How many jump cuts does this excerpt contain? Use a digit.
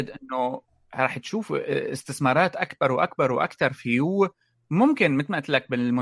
0